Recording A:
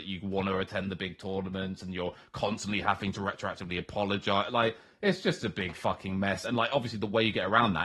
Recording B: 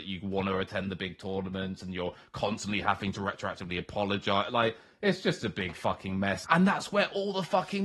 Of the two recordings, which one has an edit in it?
B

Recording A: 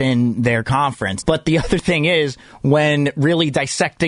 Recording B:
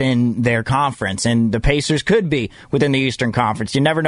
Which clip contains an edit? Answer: A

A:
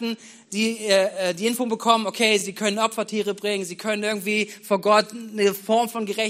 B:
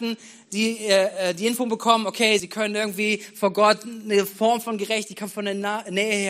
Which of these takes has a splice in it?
B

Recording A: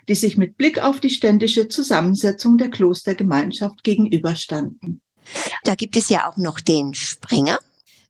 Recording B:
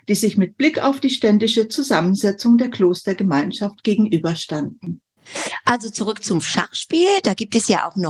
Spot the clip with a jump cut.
A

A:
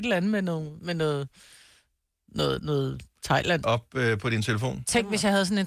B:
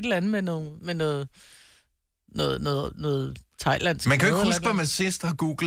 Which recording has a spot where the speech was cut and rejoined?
A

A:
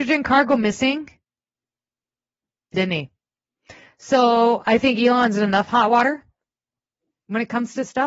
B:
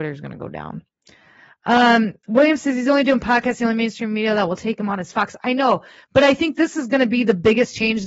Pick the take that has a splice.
A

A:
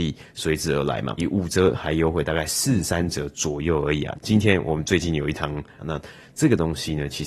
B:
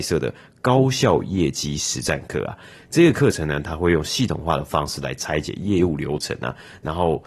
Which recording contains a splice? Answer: A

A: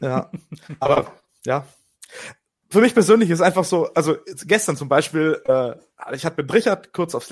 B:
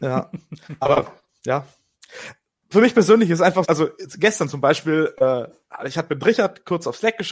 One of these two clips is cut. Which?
B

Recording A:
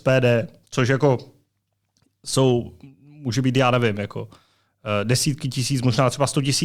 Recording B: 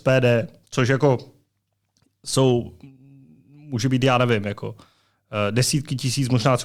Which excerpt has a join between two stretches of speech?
A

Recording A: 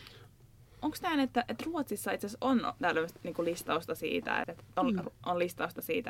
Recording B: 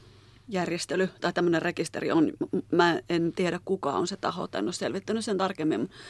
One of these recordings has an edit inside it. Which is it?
A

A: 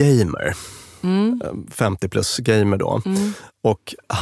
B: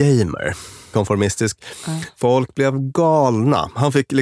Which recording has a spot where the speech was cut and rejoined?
B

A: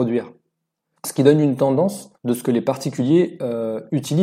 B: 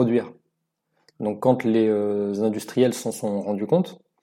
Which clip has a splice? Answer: A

